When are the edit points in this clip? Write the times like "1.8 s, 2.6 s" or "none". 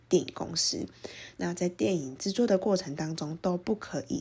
none